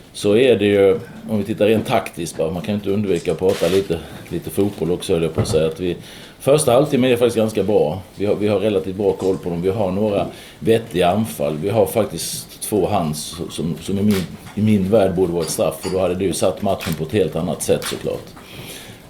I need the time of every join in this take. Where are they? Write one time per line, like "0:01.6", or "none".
none